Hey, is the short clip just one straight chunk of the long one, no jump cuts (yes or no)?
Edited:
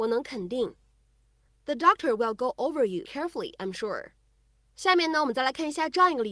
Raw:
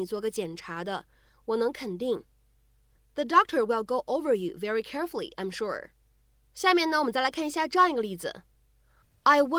no